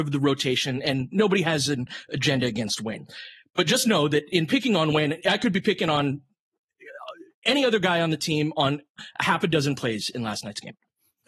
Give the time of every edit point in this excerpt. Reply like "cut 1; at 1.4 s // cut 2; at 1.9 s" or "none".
none